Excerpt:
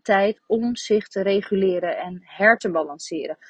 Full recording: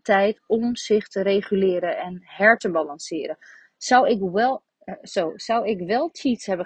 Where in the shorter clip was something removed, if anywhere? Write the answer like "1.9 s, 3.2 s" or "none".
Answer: none